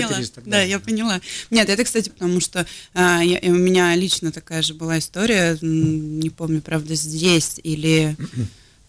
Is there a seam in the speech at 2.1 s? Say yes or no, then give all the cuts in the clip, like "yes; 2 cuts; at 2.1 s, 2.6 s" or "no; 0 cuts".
yes; 1 cut; at 2.1 s